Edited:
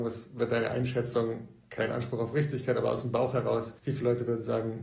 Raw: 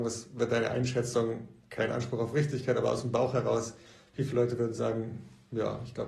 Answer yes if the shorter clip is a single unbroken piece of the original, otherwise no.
no